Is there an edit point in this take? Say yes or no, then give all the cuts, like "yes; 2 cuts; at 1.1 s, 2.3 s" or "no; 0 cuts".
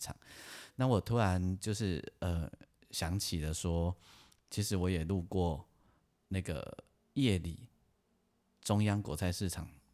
no; 0 cuts